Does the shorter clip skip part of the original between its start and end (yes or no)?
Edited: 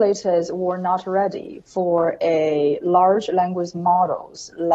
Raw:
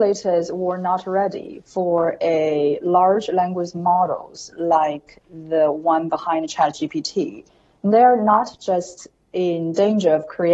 no